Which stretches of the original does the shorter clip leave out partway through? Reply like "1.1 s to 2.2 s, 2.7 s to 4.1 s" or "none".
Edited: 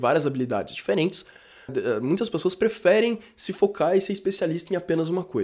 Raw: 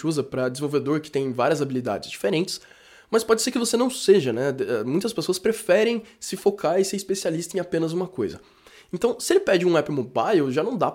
3.0 s to 4.5 s